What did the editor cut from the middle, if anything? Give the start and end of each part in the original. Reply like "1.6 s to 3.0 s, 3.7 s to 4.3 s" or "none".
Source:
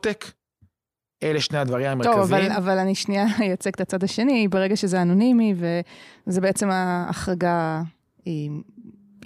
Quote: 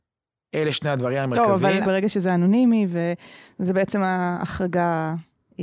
2.5 s to 4.5 s